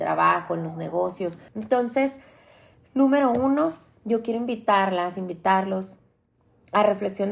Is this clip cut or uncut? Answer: cut